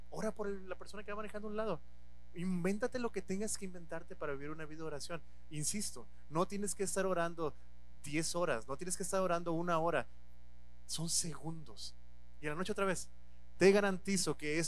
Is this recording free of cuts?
no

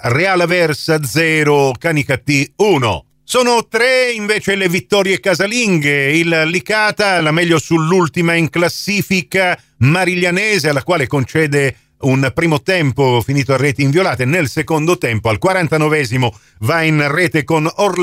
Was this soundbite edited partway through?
no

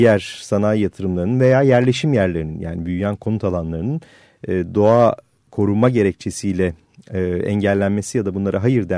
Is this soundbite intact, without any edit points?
yes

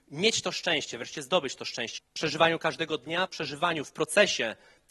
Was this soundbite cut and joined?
yes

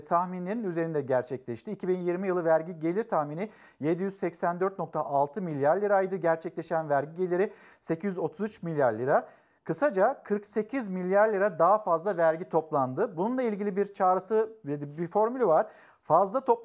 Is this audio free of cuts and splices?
yes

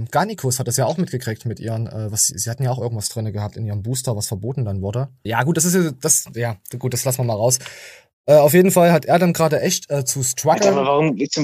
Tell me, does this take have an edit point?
yes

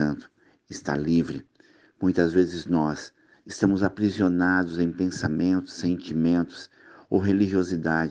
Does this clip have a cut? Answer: no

